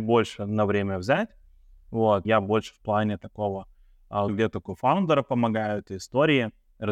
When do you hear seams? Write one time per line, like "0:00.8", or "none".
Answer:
0:02.2
0:04.3